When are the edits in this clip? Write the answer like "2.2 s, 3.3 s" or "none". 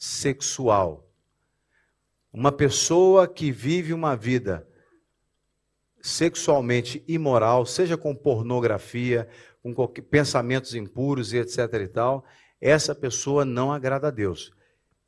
none